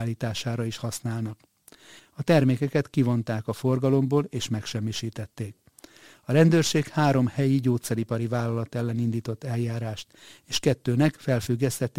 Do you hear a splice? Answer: yes; 1 cut; at 2.0 s

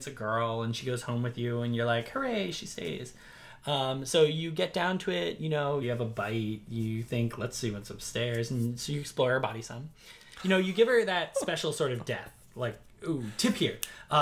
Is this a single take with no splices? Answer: no; 1 cut; at 5.8 s

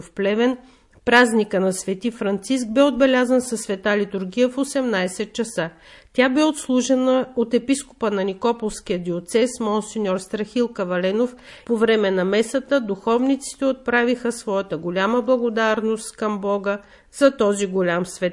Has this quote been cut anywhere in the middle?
no; 0 cuts

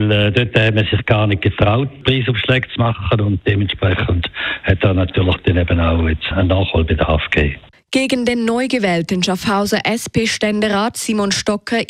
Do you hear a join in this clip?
yes; 2 cuts; at 6.3 s, 7.7 s

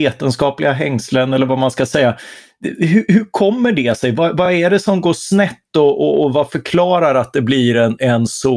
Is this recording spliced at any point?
no; 0 cuts

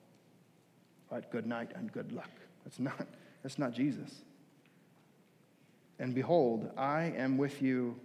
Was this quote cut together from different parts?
no; 0 cuts

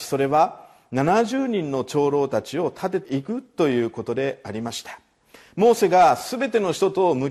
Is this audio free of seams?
no; 1 cut; at 3.0 s

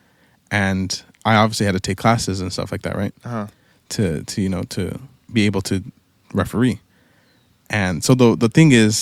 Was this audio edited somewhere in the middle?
no; 0 cuts

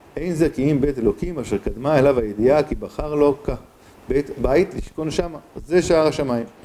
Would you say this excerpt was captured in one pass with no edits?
no; 1 cut; at 5.5 s

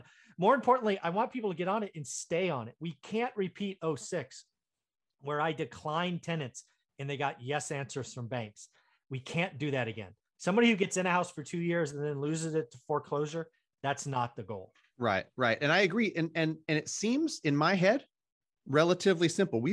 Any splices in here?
no; 0 cuts

